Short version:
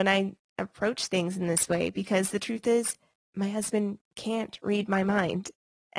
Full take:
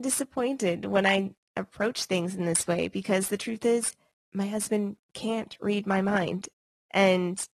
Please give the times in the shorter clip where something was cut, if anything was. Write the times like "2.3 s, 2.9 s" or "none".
none